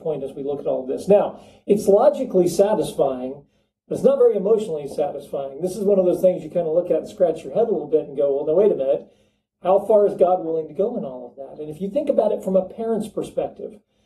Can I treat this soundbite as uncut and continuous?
yes; 0 cuts

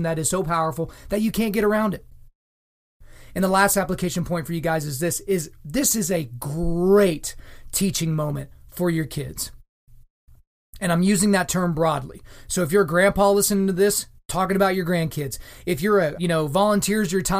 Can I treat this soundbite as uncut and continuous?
no; 1 cut; at 16.1 s

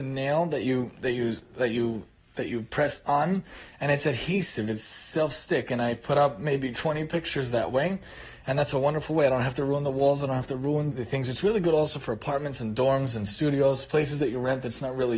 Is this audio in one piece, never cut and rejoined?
no; 1 cut; at 10.9 s

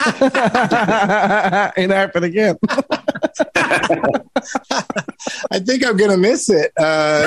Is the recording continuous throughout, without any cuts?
yes; 0 cuts

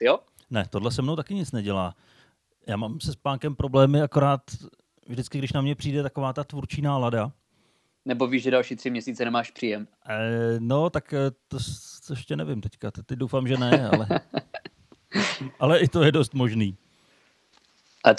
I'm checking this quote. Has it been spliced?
no; 0 cuts

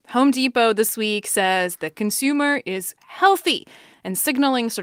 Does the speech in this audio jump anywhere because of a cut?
yes; 1 cut; at 3.0 s

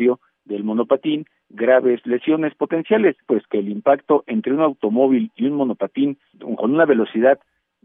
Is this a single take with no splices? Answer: no; 1 cut; at 3.2 s

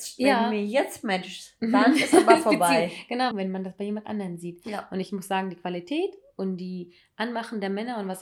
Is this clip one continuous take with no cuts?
no; 1 cut; at 3.3 s

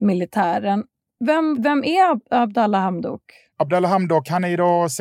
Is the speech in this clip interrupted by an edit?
yes; 1 cut; at 1.6 s

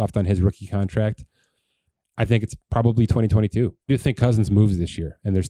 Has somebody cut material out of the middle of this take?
yes; 1 cut; at 3.9 s

